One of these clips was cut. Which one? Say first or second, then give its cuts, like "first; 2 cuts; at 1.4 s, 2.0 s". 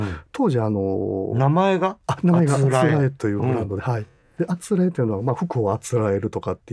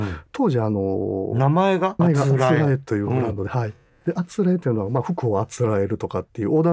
second; 1 cut; at 2.0 s